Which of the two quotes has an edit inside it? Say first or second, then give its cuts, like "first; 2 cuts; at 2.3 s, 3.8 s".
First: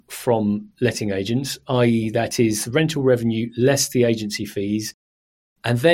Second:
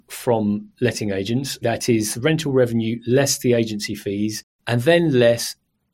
second; 2 cuts; at 1.6 s, 4.5 s